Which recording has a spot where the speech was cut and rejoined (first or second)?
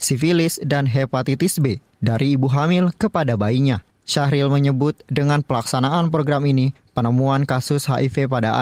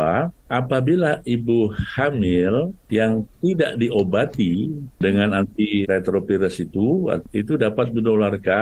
second